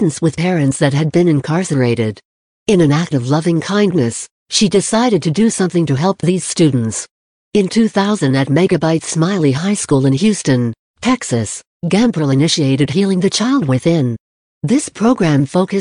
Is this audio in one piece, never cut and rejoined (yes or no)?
yes